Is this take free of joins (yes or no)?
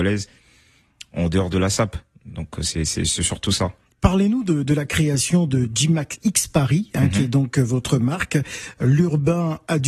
yes